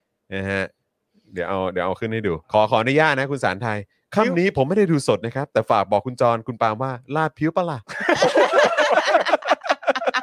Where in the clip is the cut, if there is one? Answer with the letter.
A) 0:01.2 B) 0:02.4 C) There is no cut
B